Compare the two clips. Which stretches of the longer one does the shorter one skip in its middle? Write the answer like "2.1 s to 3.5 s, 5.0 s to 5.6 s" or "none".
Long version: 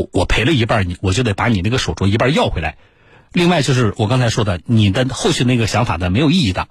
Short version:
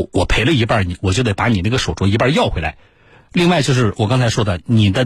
none